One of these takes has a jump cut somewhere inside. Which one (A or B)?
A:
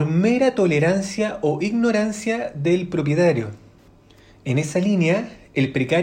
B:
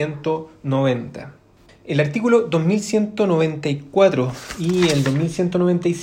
B